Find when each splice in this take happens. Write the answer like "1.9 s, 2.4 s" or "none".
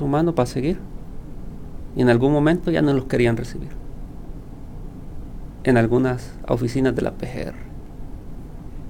1.9 s